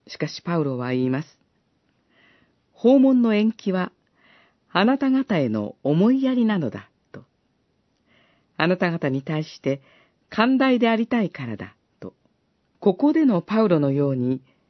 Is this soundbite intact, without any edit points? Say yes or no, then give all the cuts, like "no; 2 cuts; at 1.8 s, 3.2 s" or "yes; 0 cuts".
no; 1 cut; at 12.7 s